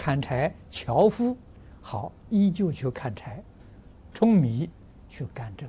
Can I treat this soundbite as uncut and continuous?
no; 1 cut; at 4.1 s

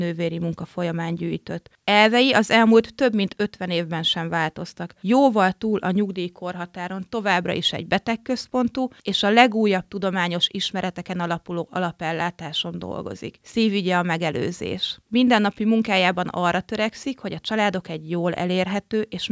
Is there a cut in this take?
no; 0 cuts

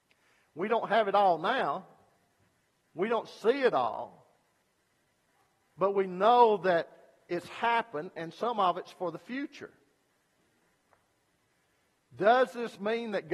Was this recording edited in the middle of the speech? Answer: no; 0 cuts

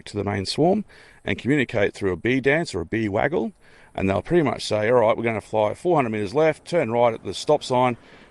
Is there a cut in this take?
no; 0 cuts

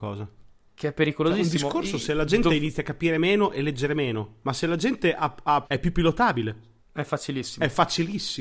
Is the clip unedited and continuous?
no; 2 cuts; at 5.6 s, 6.8 s

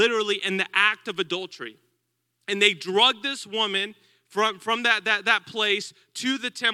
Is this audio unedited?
yes; 0 cuts

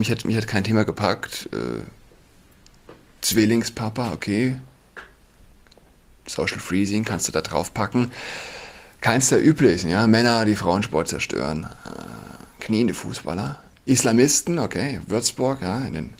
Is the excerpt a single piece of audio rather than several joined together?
yes; 0 cuts

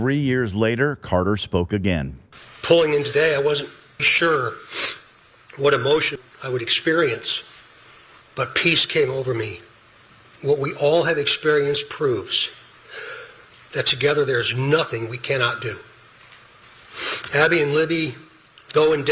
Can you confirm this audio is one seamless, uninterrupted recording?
no; 1 cut; at 4.0 s

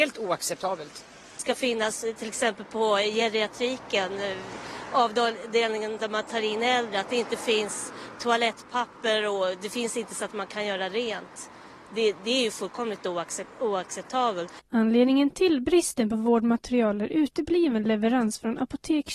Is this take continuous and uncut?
yes; 0 cuts

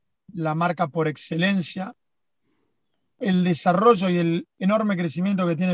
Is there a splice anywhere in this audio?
no; 0 cuts

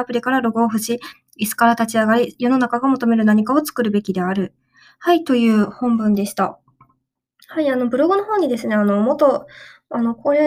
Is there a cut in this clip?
no; 0 cuts

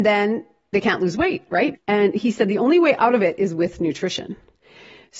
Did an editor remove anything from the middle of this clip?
yes; 1 cut; at 1.7 s

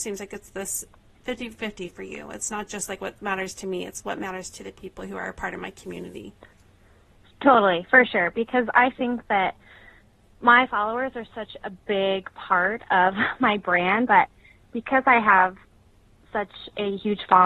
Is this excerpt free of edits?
no; 1 cut; at 14.1 s

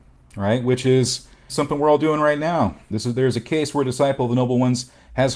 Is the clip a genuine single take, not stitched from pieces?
no; 2 cuts; at 1.5 s, 2.9 s

